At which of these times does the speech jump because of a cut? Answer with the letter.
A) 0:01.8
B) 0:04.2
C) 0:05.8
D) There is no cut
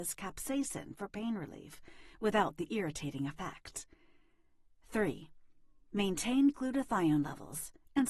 D